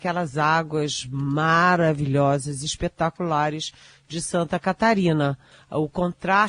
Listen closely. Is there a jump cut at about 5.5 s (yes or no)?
yes